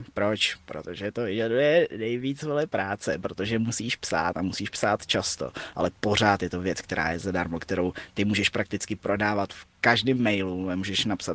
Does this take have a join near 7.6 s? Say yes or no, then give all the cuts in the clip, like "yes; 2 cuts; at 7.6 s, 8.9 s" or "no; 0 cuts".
no; 0 cuts